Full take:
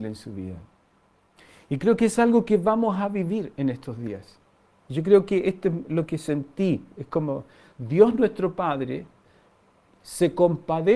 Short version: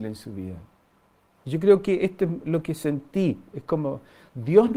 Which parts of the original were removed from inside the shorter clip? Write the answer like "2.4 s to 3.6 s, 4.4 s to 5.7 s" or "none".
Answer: 1.3 s to 4.8 s